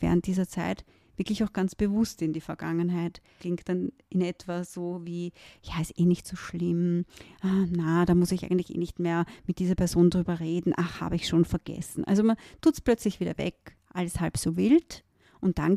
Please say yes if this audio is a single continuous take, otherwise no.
yes